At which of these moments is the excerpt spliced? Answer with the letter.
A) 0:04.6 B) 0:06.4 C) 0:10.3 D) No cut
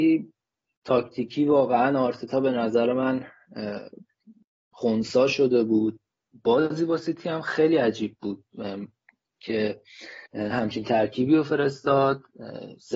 C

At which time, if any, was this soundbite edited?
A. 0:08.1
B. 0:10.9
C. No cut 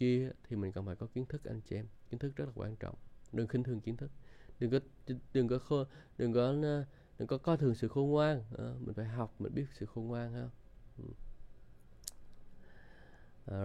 C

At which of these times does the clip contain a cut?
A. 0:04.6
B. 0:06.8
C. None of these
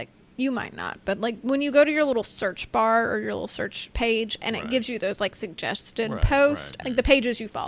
B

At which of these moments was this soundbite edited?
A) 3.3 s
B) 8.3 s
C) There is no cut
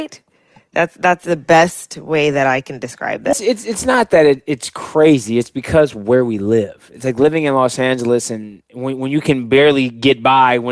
A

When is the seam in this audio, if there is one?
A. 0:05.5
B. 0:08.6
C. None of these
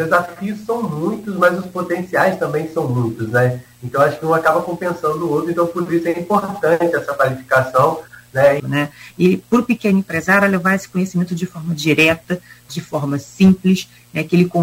B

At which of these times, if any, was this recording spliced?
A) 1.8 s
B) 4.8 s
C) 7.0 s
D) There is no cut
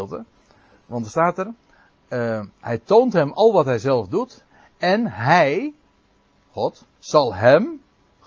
C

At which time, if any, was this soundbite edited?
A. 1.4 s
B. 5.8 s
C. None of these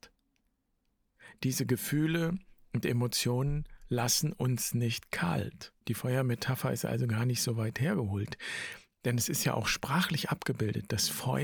B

